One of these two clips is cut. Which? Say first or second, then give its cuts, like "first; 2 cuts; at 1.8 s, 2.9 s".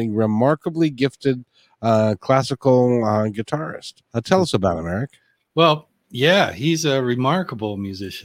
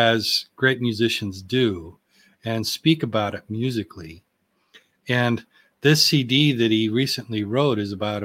first; 1 cut; at 4.0 s